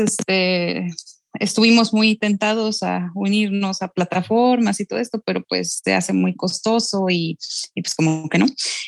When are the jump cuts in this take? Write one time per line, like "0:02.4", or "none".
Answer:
none